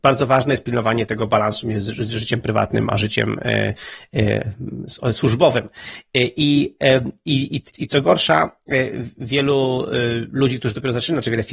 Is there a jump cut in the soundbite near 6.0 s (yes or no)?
no